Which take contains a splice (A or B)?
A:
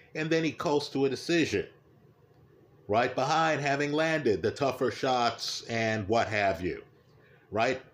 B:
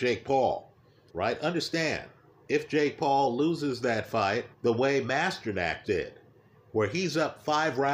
B